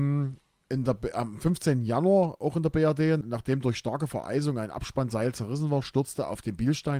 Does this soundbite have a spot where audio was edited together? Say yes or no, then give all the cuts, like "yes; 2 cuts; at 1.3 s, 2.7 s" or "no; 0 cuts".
yes; 1 cut; at 3.2 s